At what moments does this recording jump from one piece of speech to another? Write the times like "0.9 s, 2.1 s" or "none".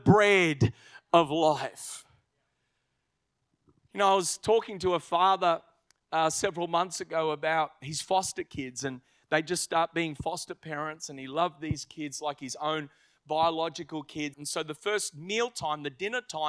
14.3 s